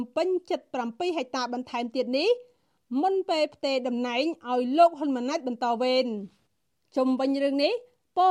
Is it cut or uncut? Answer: uncut